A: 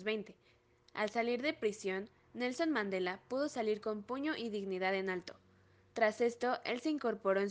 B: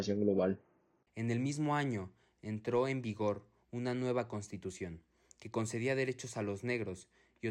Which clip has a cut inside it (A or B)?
B